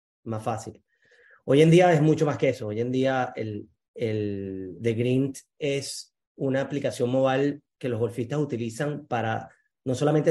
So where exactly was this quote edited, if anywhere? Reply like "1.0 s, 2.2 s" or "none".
none